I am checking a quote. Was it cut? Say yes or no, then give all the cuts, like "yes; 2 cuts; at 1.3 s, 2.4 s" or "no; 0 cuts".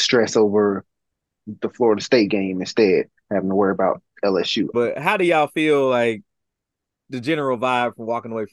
yes; 1 cut; at 4.7 s